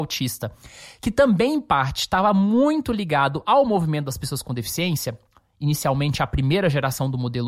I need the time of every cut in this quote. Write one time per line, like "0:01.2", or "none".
none